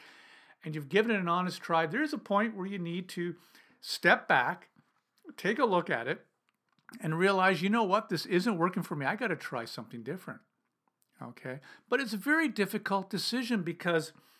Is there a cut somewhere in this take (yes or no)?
no